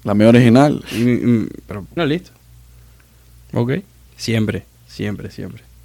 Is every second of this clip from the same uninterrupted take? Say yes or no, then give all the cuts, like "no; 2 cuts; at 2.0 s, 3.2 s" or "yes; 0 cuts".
no; 2 cuts; at 2.0 s, 4.1 s